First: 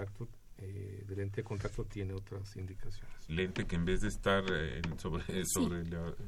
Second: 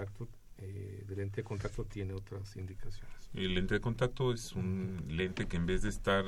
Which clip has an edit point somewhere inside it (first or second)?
first